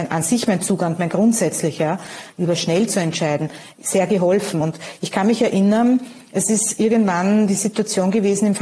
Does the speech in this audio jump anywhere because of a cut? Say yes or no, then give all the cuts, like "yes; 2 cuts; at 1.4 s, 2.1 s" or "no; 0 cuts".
no; 0 cuts